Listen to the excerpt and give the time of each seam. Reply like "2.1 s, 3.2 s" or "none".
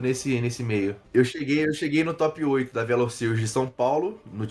1.0 s